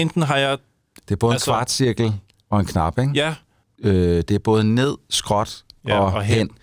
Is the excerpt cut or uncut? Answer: cut